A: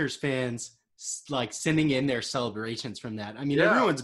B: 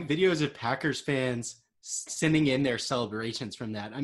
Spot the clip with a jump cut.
B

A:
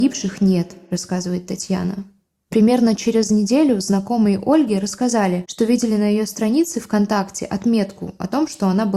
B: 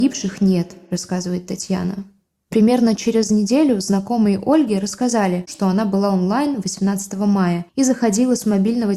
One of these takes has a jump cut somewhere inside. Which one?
B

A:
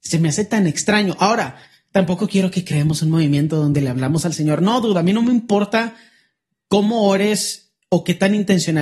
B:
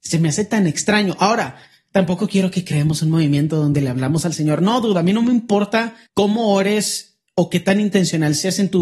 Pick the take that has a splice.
B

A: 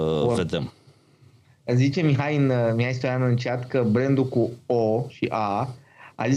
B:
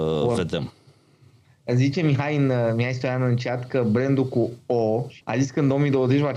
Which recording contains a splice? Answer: B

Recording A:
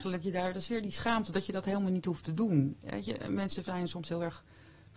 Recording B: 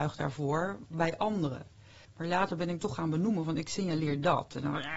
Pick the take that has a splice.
B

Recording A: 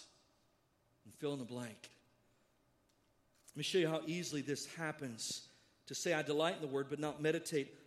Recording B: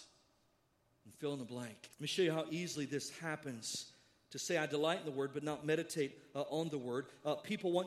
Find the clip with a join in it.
B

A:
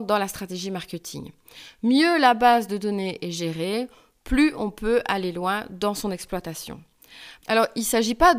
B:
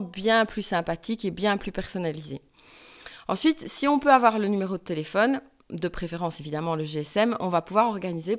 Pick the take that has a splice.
A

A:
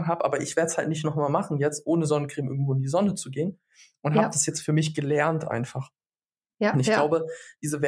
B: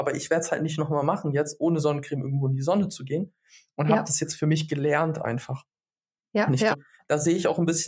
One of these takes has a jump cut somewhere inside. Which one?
B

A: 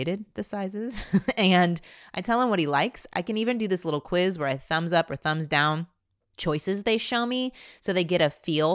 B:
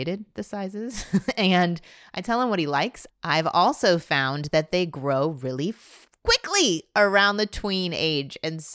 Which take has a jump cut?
B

